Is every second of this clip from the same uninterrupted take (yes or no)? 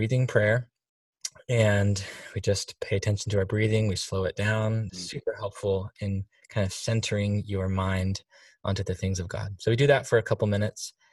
no